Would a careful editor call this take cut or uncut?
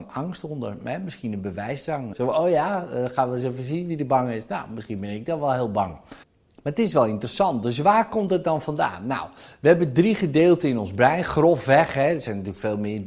cut